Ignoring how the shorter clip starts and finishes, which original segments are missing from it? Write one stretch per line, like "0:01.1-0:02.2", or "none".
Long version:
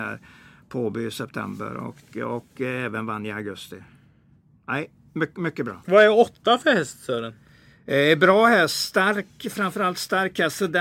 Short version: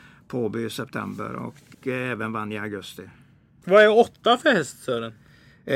0:02.1-0:02.5
0:04.4-0:05.8